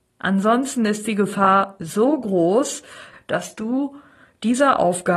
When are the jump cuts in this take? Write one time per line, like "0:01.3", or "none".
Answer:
0:03.1